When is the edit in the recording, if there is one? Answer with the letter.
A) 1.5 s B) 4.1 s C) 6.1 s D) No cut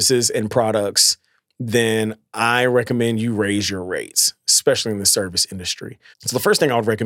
C